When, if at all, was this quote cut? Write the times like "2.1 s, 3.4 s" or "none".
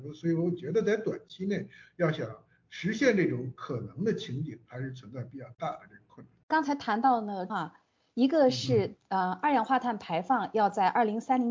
6.4 s, 7.5 s